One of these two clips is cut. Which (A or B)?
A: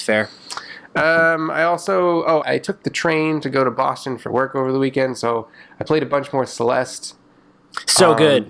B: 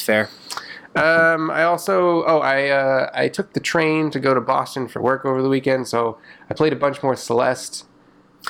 A